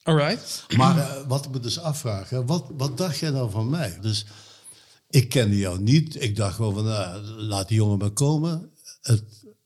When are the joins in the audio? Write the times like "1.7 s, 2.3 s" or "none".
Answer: 4.0 s